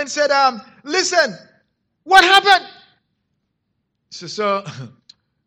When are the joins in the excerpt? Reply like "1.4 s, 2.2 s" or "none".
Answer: none